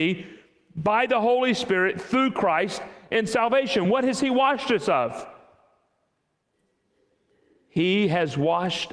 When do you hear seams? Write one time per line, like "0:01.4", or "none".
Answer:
none